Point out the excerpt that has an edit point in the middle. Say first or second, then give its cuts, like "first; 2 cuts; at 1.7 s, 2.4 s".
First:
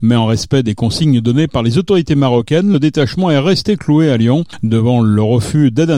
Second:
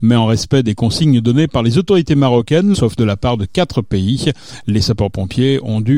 second; 1 cut; at 2.7 s